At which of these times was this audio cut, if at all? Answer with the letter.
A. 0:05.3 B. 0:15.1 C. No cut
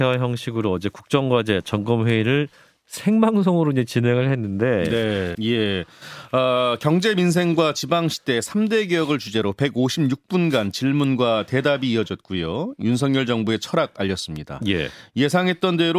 A